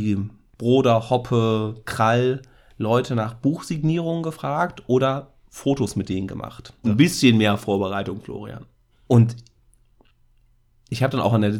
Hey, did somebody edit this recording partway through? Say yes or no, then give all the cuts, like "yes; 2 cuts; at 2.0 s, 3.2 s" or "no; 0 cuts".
yes; 2 cuts; at 6.8 s, 8.9 s